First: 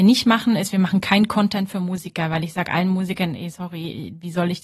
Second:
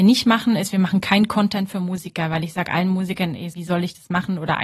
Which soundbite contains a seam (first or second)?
second